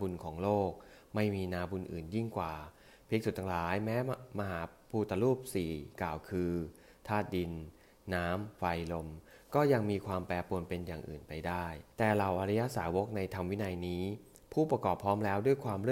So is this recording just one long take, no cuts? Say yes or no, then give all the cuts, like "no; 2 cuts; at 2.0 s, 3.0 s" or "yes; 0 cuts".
no; 1 cut; at 11.9 s